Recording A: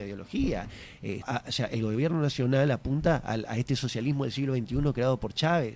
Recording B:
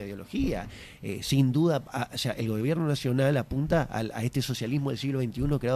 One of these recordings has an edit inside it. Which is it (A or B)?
A